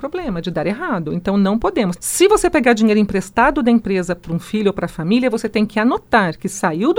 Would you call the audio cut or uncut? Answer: cut